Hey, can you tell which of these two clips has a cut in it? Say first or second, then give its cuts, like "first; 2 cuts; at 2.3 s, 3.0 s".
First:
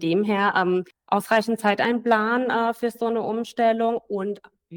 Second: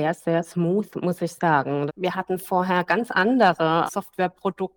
second; 2 cuts; at 1.9 s, 3.9 s